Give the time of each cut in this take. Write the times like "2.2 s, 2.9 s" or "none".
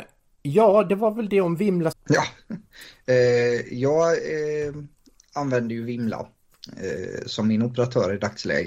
1.9 s

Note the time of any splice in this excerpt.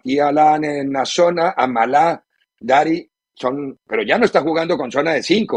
none

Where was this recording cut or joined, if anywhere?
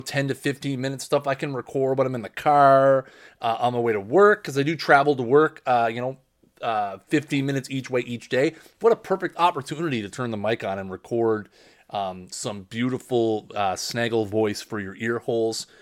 none

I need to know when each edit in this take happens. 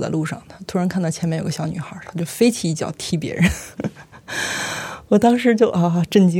none

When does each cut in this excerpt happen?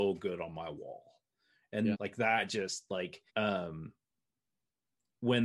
1.9 s, 3.3 s

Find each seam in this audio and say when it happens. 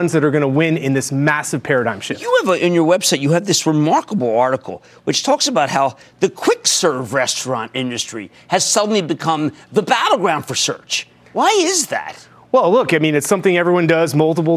none

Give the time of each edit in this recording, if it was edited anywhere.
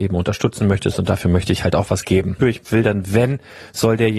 2.4 s

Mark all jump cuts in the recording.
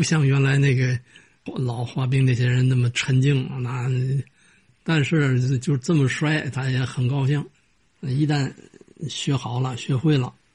4.8 s

